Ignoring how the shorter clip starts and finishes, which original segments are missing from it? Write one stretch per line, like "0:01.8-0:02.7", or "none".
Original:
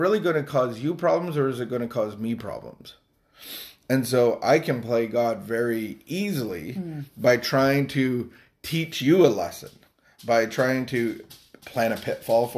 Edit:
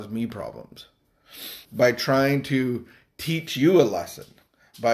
0:03.7-0:07.1